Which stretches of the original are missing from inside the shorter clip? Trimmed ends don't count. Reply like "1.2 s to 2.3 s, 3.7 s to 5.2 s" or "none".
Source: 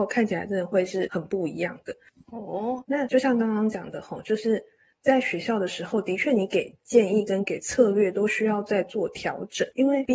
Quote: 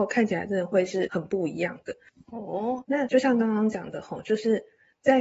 none

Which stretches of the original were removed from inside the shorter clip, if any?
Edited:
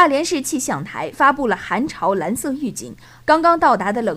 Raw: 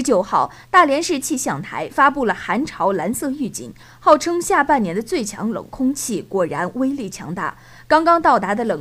4.0 s to 7.8 s

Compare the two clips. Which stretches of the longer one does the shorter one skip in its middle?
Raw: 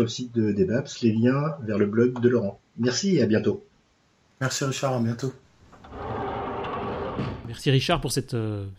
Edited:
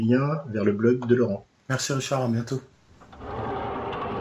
2.7 s to 4.3 s

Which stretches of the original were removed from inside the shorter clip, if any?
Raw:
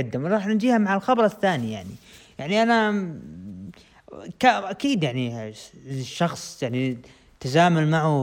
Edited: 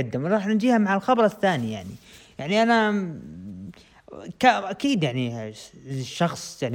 none

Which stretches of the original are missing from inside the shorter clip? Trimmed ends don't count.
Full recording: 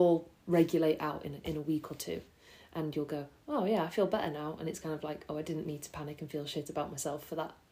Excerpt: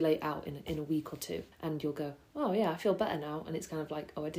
2.3 s to 2.6 s

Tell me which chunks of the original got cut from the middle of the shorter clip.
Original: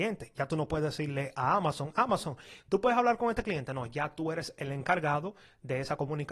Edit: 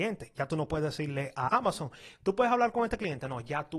1.5 s to 1.9 s

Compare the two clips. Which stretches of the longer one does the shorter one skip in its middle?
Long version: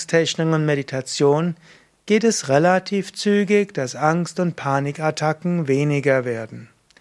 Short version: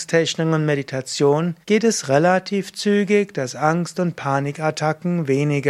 1.6 s to 2.0 s

